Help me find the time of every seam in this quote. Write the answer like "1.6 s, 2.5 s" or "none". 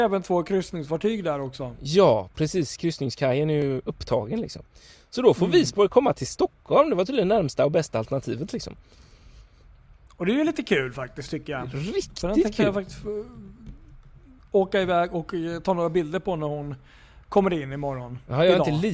none